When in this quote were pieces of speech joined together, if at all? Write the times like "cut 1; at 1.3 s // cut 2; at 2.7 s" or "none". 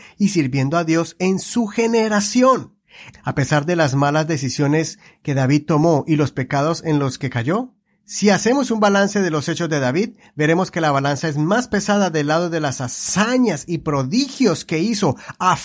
cut 1; at 3.1 s